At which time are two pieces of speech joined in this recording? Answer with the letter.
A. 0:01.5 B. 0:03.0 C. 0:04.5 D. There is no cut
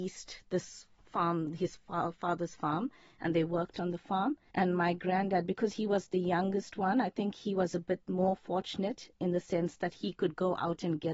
C